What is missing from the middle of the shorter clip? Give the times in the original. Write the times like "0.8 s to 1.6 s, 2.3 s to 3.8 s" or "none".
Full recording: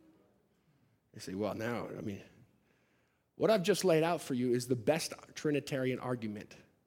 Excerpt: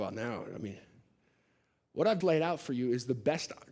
3.6 s to 3.8 s